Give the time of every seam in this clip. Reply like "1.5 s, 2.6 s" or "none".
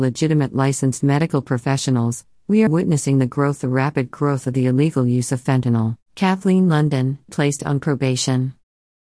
2.7 s, 6.0 s, 7.3 s